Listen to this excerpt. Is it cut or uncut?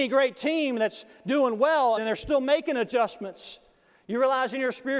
cut